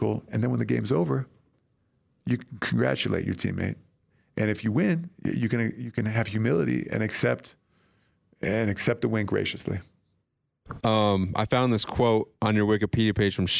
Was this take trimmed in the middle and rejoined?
yes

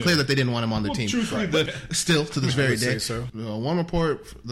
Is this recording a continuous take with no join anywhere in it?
no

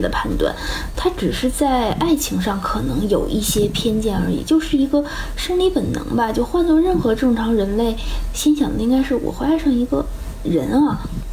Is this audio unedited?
no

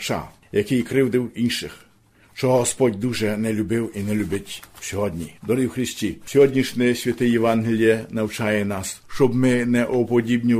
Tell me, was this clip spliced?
yes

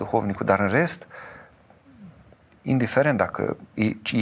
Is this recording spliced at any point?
no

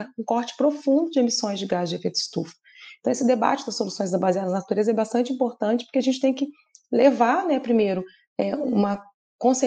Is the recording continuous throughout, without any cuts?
yes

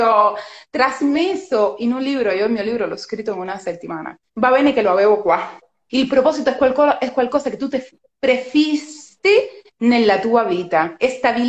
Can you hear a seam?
yes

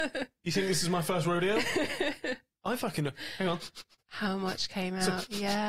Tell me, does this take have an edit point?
no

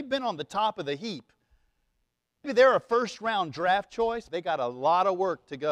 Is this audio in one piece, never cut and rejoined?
no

